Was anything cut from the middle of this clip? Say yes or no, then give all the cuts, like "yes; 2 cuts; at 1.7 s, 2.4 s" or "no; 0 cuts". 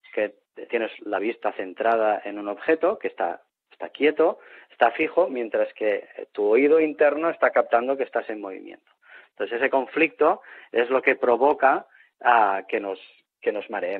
no; 0 cuts